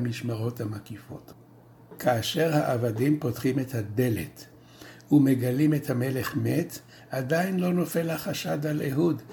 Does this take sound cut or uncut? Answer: uncut